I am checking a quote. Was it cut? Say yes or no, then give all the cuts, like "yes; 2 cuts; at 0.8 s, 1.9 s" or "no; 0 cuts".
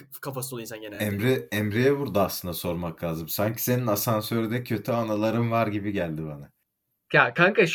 no; 0 cuts